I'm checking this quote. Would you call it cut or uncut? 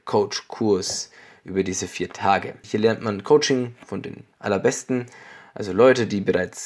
cut